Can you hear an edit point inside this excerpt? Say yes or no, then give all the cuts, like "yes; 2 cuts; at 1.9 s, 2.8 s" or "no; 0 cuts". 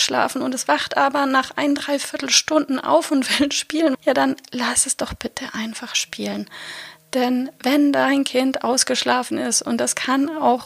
yes; 1 cut; at 3.9 s